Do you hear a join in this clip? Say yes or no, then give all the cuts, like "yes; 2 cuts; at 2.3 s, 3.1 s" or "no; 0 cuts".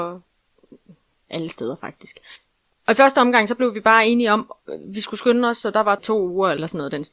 no; 0 cuts